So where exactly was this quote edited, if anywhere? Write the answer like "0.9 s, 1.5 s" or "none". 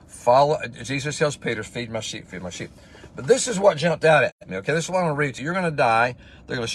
2.3 s, 5.4 s